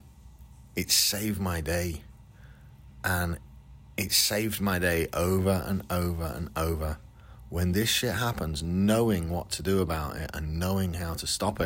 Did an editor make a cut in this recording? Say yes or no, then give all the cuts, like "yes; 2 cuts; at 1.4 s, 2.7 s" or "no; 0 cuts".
no; 0 cuts